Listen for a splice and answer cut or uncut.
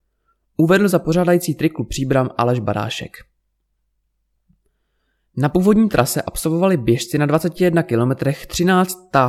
uncut